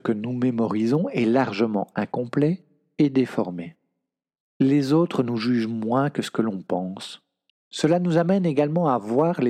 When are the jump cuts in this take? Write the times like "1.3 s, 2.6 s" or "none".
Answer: 4.4 s, 7.5 s